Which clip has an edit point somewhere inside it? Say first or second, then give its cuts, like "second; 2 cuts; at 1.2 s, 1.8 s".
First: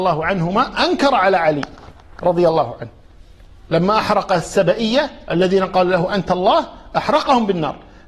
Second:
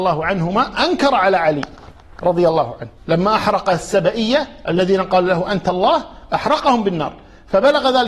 second; 1 cut; at 3.0 s